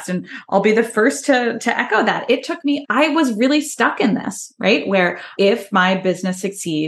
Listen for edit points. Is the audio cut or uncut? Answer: cut